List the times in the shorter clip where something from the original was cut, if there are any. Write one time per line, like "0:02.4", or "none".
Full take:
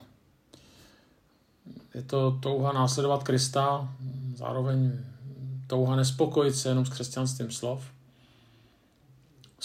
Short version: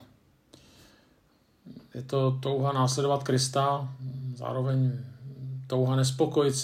none